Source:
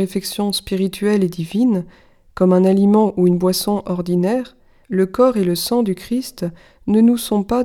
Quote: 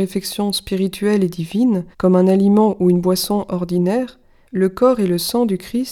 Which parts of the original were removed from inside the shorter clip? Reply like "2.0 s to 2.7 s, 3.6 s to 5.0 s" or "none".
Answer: 1.9 s to 2.3 s